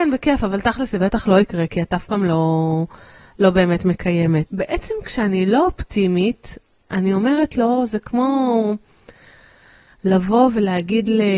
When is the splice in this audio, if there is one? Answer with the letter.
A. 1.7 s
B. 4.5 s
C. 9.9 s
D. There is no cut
B